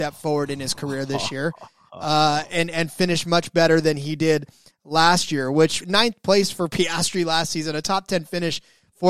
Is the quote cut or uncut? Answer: cut